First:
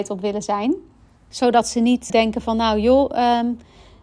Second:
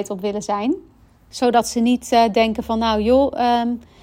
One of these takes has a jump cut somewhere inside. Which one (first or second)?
first